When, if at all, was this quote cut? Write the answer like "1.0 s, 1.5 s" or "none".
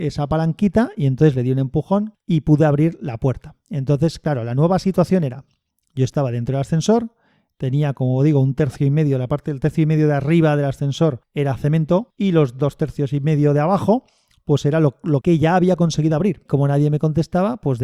15.2 s, 16.5 s

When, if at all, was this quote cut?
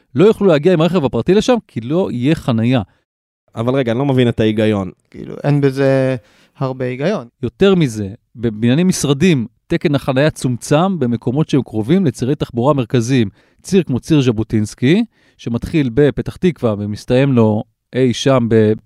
5.1 s, 7.3 s, 13.4 s

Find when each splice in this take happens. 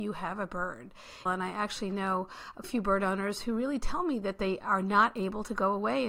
1.3 s, 2.6 s

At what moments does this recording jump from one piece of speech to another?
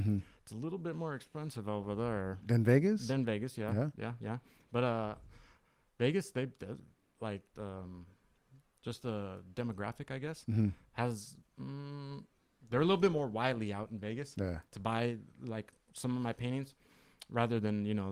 none

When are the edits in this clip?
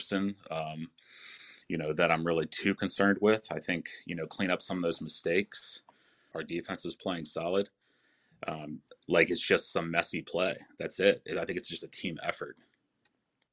6.3 s

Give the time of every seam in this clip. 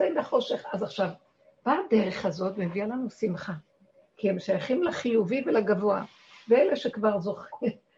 4.0 s

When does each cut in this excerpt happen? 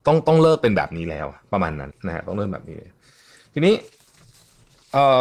1.9 s

